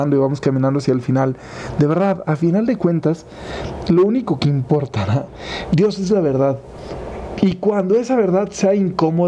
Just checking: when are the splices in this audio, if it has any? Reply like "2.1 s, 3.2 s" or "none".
5.7 s, 7.4 s

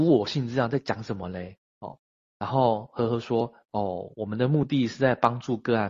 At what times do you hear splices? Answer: none

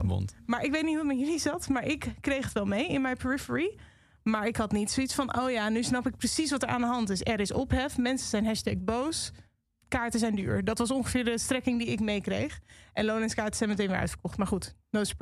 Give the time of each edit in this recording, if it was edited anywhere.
none

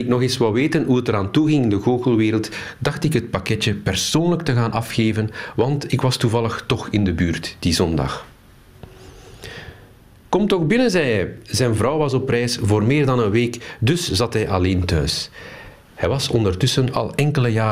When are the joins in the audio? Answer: none

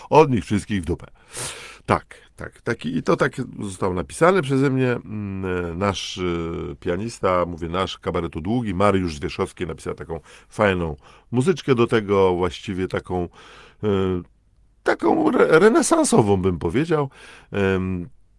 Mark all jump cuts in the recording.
none

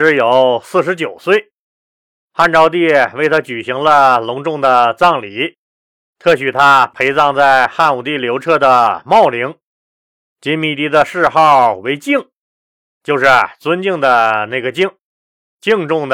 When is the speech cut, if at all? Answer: none

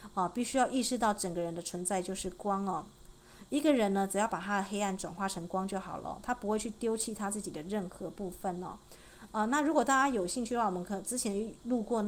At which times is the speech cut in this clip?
none

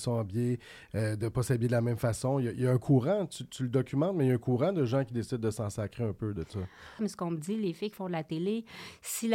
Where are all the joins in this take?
7.0 s

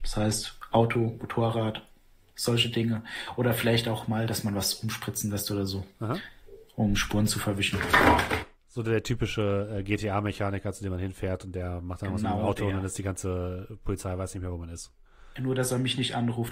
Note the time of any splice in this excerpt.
none

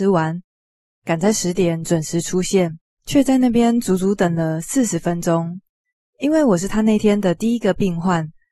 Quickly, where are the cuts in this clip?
none

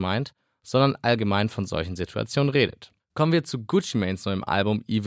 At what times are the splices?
3.0 s

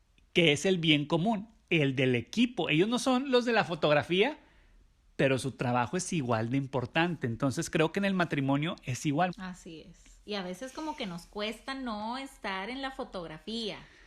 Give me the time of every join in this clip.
9.3 s

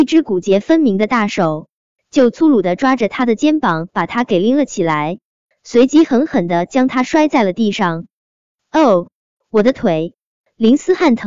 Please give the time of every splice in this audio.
none

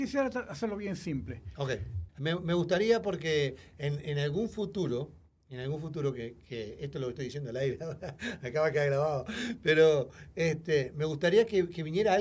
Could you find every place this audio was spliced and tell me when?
2.1 s

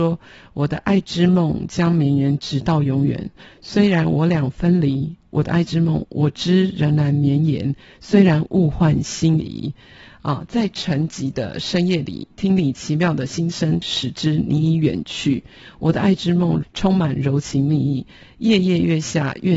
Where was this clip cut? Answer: 13.8 s, 16.6 s

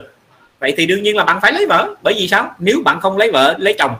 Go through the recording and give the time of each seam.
none

